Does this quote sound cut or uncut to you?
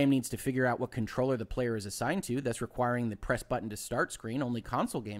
uncut